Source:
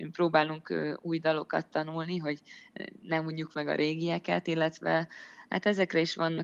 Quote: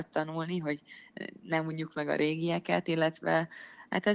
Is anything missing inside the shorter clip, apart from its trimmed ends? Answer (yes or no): no